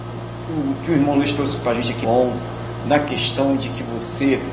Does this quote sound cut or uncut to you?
cut